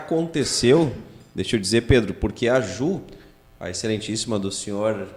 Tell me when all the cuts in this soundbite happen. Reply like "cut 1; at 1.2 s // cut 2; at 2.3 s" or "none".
none